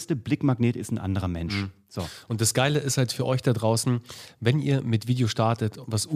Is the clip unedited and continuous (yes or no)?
yes